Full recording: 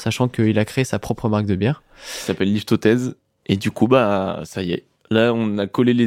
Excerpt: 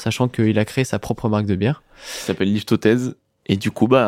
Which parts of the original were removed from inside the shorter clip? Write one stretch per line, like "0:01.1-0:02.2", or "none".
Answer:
none